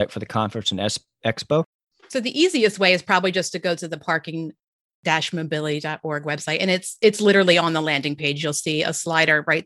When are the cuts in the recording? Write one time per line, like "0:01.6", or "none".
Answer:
0:01.9

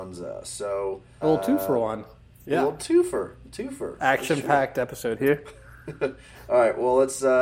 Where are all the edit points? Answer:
0:01.2

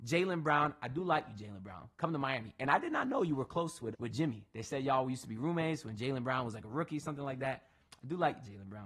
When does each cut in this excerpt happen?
0:03.9

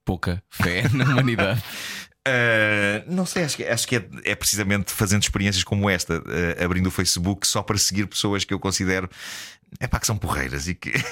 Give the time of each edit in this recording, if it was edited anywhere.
none

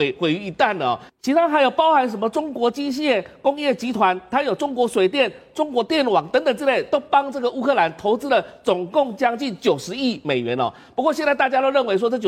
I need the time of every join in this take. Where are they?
none

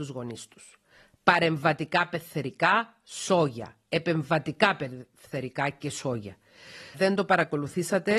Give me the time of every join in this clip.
0:06.9

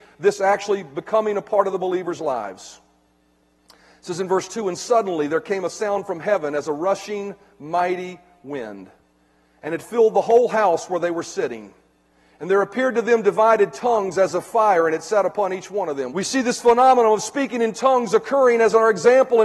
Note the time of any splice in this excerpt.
0:16.1

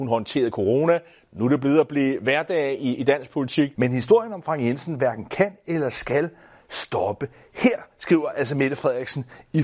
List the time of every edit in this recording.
0:03.7

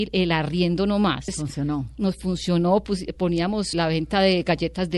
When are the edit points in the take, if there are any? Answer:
0:01.3
0:03.7

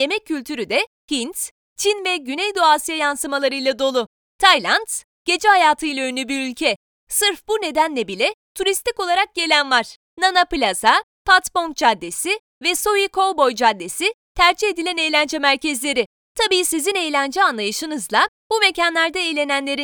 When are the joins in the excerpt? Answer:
0:04.2

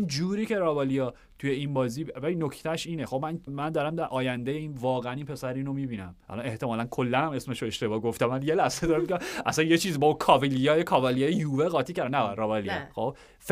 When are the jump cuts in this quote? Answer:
0:03.5
0:06.2

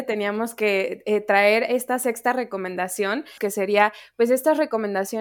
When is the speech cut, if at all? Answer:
0:03.4

